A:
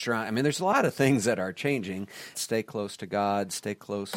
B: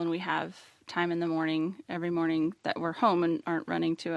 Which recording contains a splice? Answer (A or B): A